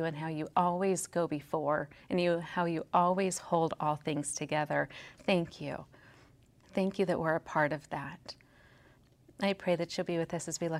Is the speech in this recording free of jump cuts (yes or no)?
yes